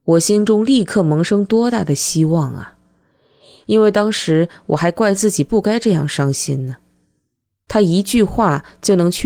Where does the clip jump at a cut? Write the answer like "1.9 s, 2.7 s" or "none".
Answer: none